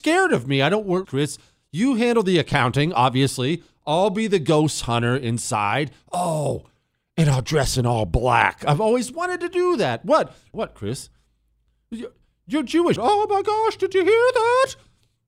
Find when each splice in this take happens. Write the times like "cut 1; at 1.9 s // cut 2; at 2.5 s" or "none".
cut 1; at 1.0 s // cut 2; at 10.5 s // cut 3; at 13.0 s